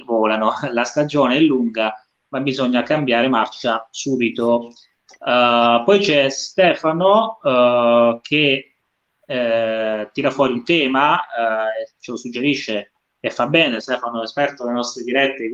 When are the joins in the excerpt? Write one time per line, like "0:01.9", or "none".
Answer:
none